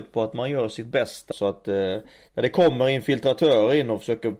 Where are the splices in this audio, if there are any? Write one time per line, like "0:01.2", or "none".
0:01.3